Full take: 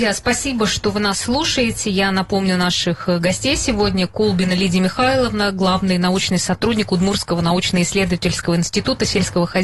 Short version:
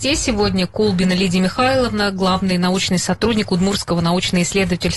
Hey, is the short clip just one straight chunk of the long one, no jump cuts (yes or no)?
yes